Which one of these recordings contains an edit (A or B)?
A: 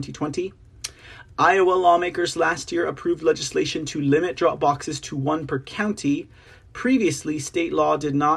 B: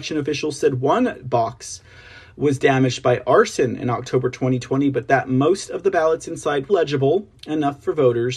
B